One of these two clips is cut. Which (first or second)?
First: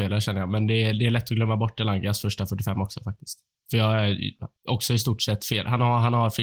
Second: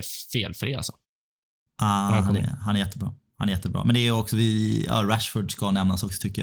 first